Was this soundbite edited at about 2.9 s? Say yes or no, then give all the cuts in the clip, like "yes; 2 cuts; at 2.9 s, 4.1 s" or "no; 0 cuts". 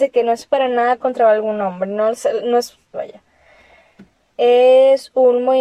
yes; 1 cut; at 2.9 s